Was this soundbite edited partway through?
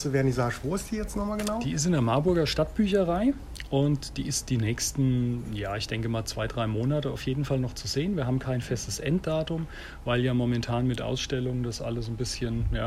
no; 0 cuts

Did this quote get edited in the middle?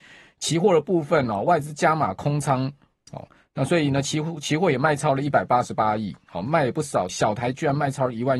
yes; 1 cut; at 7.1 s

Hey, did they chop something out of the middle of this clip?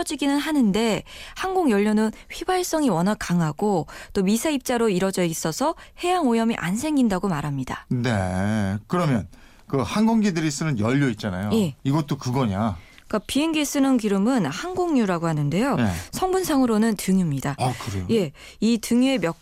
yes; 2 cuts; at 11.8 s, 17.6 s

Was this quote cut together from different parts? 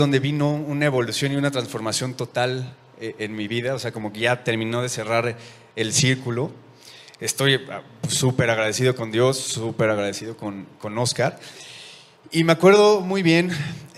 no; 0 cuts

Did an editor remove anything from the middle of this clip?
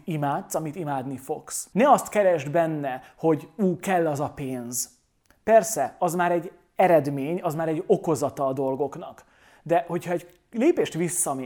yes; 1 cut; at 1.7 s

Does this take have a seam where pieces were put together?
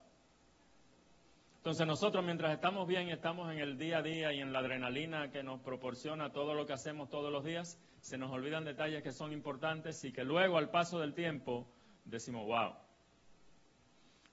no; 0 cuts

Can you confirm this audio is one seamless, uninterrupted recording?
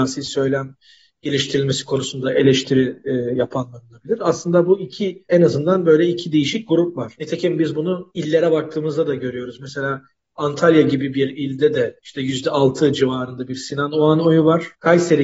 yes; 0 cuts

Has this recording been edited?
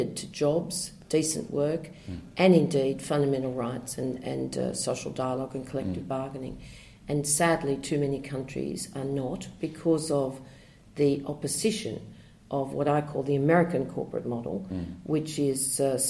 no; 0 cuts

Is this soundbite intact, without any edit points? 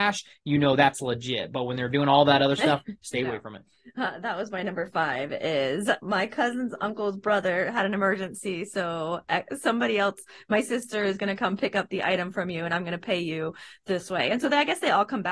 yes; 0 cuts

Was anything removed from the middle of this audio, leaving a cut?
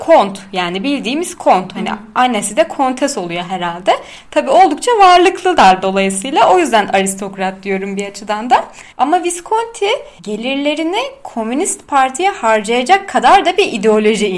yes; 2 cuts; at 8.9 s, 10.2 s

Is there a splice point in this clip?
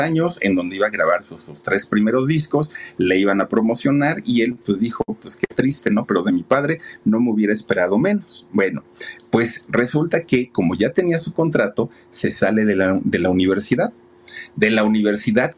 no; 0 cuts

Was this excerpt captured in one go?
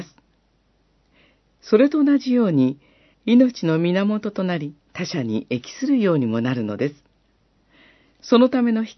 no; 2 cuts; at 3.1 s, 4.8 s

